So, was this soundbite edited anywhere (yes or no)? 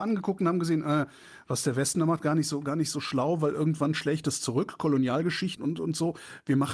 yes